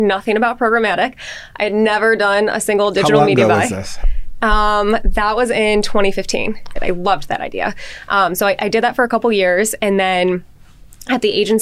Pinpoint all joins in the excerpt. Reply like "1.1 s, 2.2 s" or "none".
6.8 s